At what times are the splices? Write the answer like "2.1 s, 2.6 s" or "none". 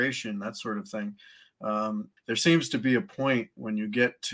2.2 s